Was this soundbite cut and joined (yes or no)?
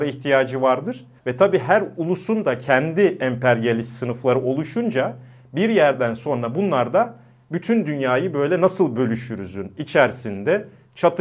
yes